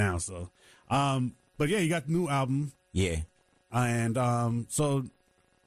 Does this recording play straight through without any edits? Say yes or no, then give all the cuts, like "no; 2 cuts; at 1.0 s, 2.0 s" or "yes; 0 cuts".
yes; 0 cuts